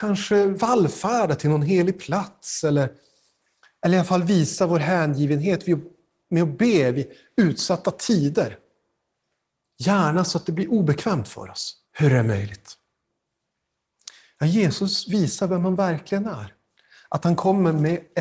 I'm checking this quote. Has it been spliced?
yes; 1 cut; at 11.8 s

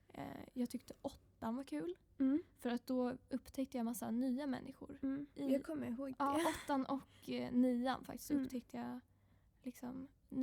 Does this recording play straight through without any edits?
yes; 0 cuts

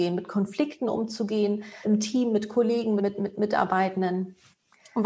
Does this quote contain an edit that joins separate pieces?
yes; 2 cuts; at 1.8 s, 3.0 s

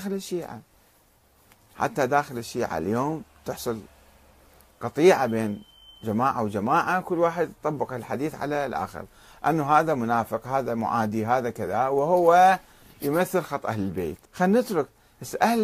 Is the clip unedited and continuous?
no; 1 cut; at 14.3 s

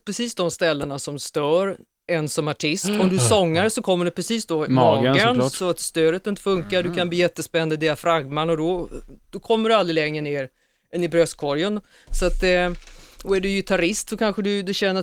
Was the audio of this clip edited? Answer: no; 0 cuts

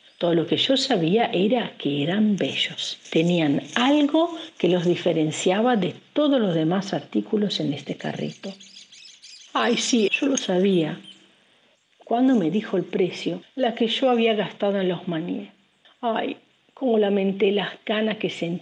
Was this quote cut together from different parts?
yes; 3 cuts; at 10.1 s, 11.7 s, 13.5 s

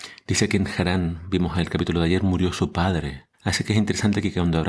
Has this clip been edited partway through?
yes; 1 cut; at 3.3 s

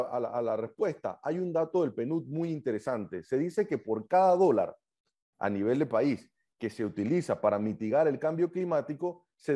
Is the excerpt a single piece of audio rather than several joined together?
yes; 0 cuts

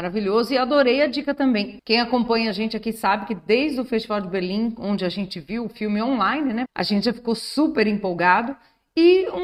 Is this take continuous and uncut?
no; 2 cuts; at 1.8 s, 6.7 s

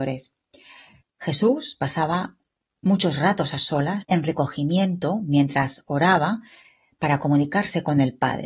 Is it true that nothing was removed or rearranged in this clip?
no; 2 cuts; at 1.0 s, 4.0 s

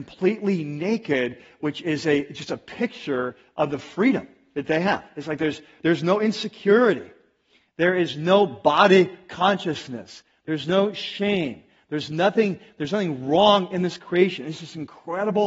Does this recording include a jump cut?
no; 0 cuts

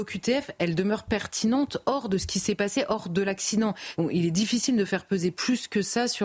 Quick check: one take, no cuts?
no; 1 cut; at 3.9 s

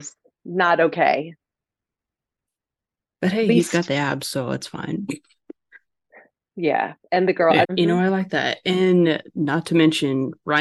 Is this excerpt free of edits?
no; 1 cut; at 7.6 s

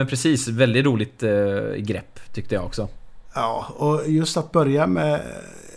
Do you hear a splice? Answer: no; 0 cuts

